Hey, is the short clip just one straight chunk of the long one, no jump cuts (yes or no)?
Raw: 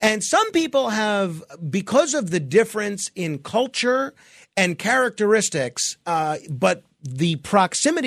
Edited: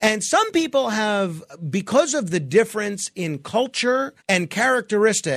no